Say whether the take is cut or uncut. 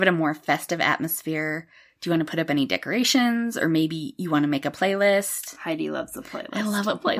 uncut